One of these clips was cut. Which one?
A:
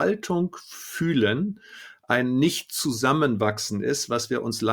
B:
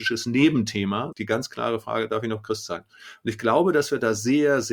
B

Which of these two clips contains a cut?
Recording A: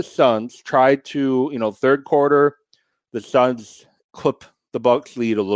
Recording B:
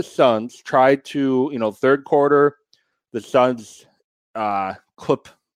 A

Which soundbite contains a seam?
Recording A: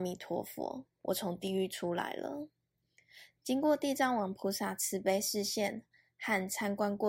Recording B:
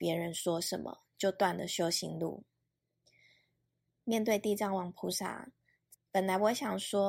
B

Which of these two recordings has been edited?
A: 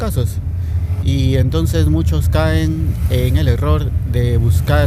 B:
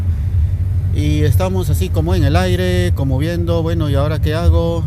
A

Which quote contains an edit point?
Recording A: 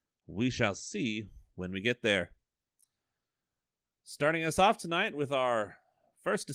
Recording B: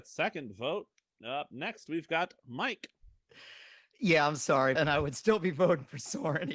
B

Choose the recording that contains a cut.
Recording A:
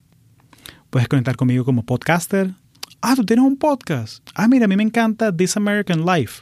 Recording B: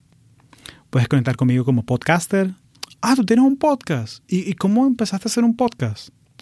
A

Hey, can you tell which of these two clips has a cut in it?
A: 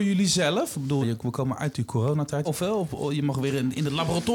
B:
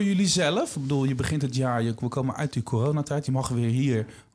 A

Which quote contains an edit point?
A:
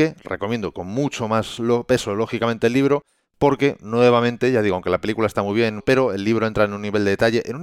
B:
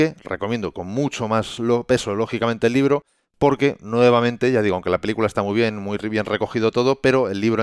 A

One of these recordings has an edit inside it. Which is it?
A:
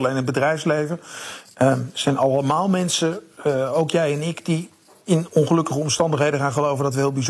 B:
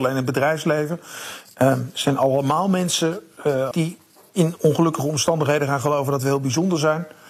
B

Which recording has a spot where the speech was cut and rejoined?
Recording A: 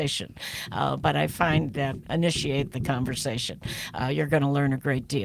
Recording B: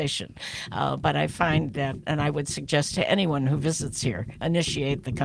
A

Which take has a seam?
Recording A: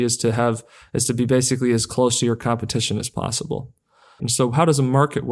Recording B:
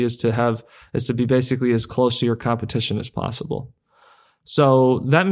A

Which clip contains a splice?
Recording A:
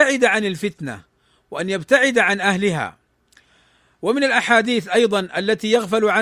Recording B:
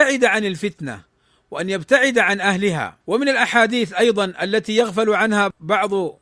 B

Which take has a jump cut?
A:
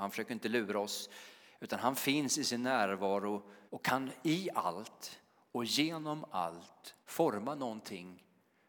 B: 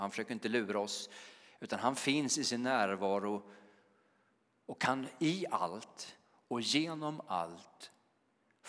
A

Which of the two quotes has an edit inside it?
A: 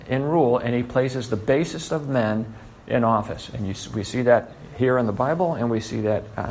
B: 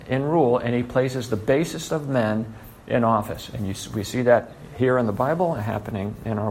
B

